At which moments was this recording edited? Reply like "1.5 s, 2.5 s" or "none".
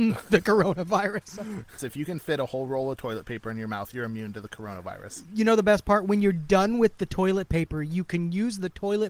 1.8 s

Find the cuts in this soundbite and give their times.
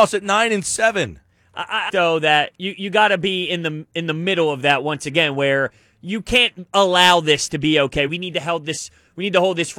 1.9 s, 8.1 s

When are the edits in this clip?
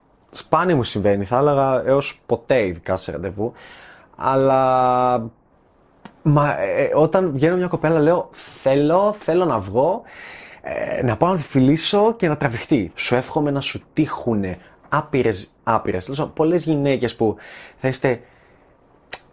6.2 s, 12.9 s

